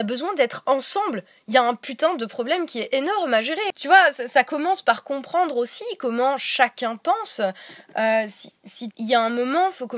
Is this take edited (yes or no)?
yes